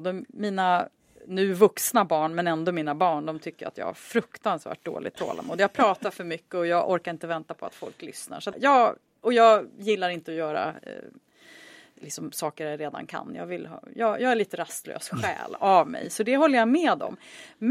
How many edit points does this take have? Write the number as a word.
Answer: one